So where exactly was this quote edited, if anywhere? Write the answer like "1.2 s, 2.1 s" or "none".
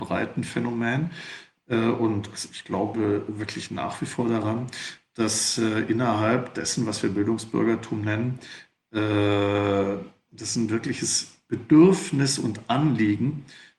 none